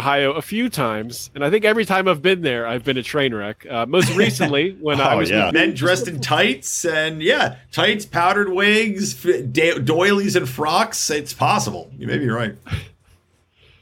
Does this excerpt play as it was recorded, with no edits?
no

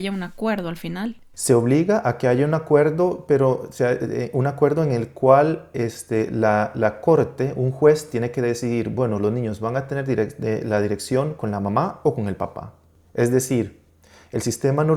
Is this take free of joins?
yes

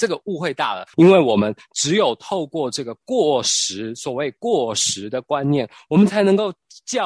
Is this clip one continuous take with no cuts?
no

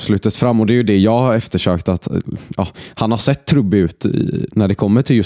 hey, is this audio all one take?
yes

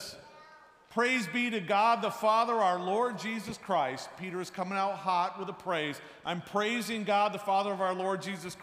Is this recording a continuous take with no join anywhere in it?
yes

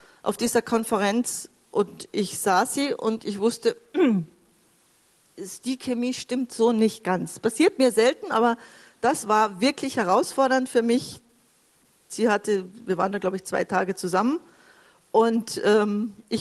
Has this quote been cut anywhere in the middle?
no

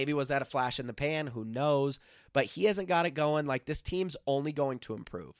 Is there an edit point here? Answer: no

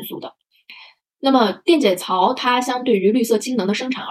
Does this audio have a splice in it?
no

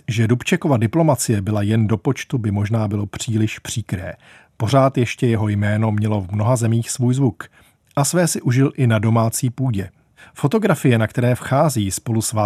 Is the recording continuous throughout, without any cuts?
yes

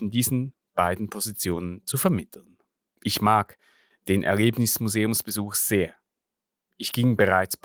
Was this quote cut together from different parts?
yes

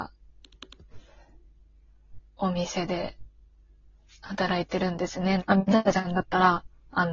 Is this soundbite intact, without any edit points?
no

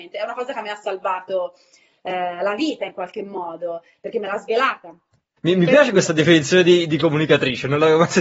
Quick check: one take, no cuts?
no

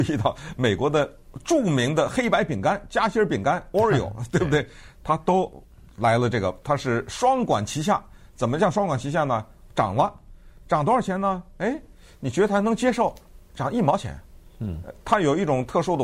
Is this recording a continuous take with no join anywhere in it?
yes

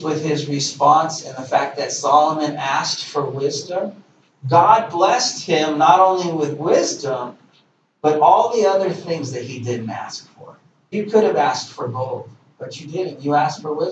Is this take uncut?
no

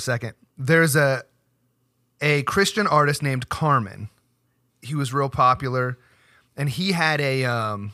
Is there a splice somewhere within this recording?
yes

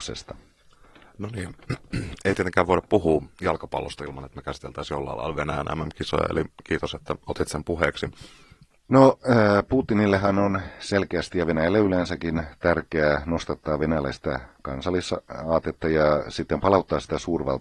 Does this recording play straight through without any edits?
no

